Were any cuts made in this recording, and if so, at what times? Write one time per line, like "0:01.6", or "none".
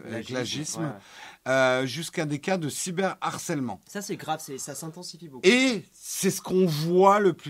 none